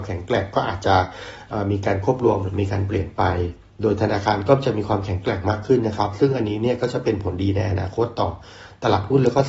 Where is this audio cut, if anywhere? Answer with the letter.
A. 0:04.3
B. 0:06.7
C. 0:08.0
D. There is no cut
D